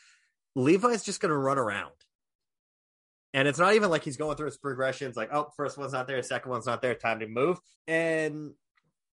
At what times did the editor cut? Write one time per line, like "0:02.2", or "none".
0:07.8